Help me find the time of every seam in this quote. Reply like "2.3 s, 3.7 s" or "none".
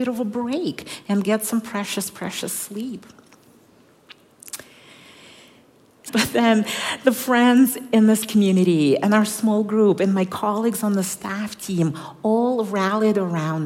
6.1 s